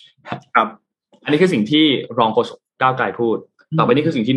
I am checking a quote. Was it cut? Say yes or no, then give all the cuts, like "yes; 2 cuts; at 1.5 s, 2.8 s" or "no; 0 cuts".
no; 0 cuts